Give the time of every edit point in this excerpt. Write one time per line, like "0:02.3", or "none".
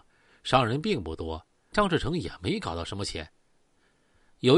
0:01.7